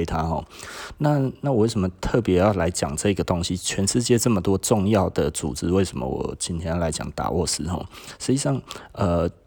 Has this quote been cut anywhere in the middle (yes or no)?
no